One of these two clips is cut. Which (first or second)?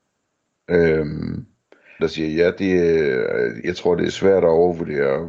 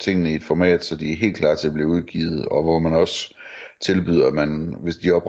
first